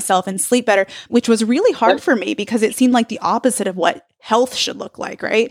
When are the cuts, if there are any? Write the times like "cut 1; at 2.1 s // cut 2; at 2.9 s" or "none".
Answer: cut 1; at 1.1 s

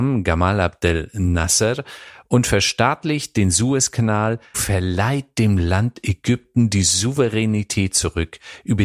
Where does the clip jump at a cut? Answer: cut 1; at 4.5 s

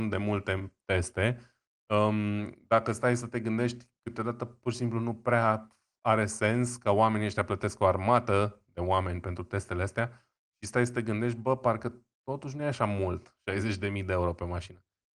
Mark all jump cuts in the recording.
none

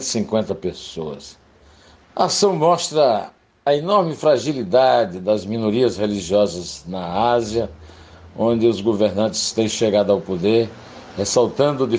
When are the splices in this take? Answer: cut 1; at 2.0 s

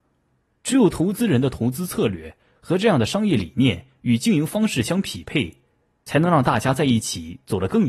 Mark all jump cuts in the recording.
none

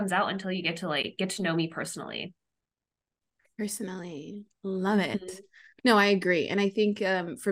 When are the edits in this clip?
none

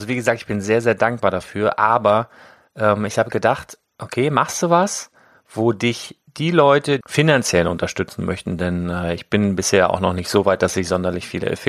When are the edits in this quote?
cut 1; at 7.0 s

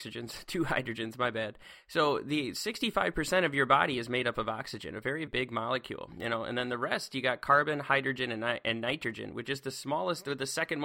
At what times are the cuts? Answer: cut 1; at 5.3 s

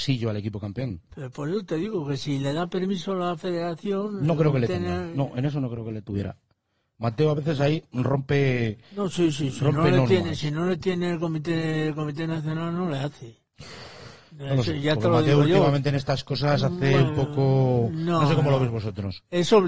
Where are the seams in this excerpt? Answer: none

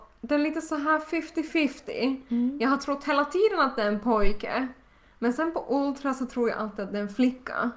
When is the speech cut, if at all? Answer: none

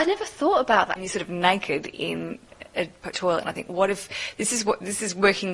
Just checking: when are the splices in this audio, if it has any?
cut 1; at 1.0 s

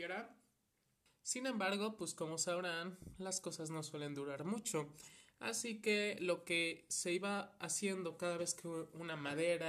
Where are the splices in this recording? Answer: cut 1; at 1.1 s

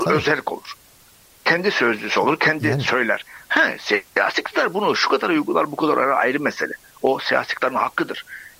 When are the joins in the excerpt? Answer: none

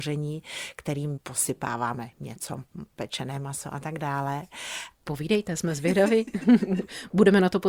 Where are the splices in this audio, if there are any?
cut 1; at 5.0 s

